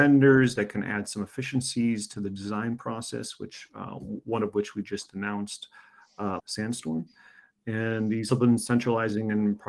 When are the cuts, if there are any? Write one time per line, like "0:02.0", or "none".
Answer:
0:06.4
0:08.3